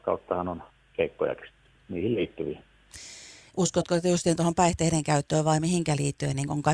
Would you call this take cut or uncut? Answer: uncut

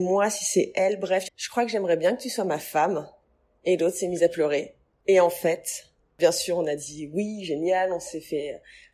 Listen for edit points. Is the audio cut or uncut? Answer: cut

